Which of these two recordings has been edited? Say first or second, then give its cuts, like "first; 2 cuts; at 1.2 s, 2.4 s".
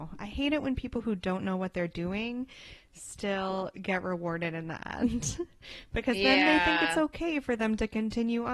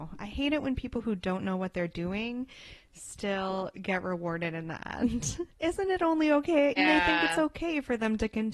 second; 2 cuts; at 5.5 s, 6.8 s